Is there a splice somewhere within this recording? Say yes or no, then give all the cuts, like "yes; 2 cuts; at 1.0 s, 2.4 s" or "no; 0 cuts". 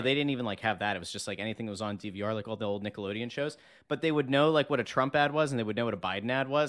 no; 0 cuts